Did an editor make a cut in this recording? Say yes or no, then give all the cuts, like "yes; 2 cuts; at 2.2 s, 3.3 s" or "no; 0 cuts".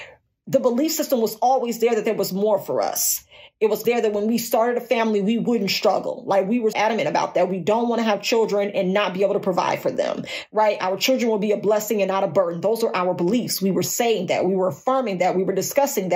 yes; 2 cuts; at 3.8 s, 6.7 s